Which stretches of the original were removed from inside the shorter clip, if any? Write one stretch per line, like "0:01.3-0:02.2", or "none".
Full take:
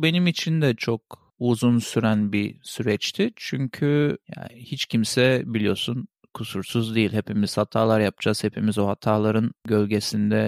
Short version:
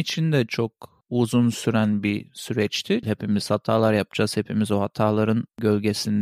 0:03.3-0:07.1